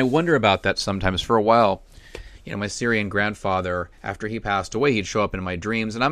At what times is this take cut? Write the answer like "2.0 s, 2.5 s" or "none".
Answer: 4.0 s